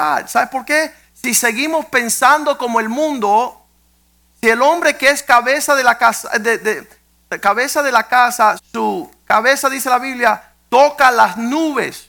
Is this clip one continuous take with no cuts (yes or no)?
no